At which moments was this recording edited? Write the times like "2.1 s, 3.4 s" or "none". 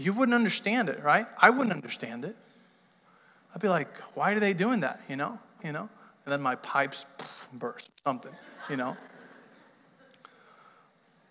5.6 s